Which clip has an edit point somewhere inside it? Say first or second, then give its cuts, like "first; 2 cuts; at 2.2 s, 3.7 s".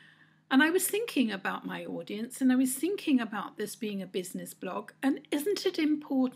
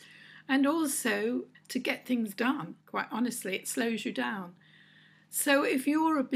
second; 2 cuts; at 1.5 s, 2.8 s